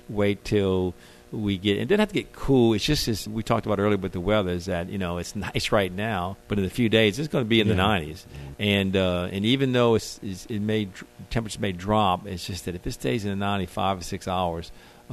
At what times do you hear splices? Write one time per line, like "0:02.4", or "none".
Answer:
0:03.3
0:06.4